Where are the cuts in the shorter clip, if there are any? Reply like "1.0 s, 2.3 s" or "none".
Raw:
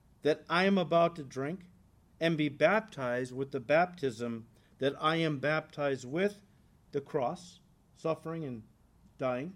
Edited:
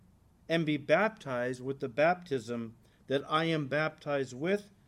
none